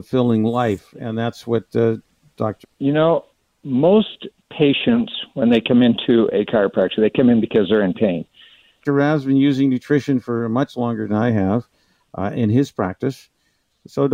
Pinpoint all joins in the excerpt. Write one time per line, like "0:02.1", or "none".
0:02.6
0:08.8